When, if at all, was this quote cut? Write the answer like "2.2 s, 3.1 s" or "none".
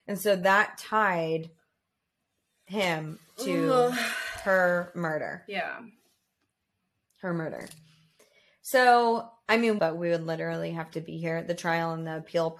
9.8 s